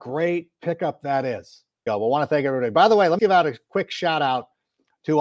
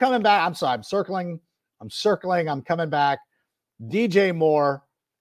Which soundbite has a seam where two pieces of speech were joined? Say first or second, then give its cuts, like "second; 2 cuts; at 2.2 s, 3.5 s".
first; 2 cuts; at 1.9 s, 3.2 s